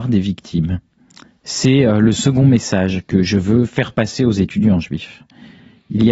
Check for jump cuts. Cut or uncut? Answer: uncut